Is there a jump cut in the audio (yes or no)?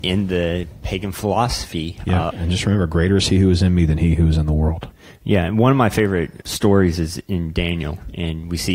yes